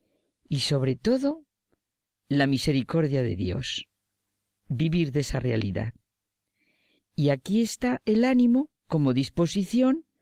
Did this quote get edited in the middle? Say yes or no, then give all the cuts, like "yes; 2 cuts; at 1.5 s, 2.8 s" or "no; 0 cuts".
yes; 2 cuts; at 7.0 s, 8.8 s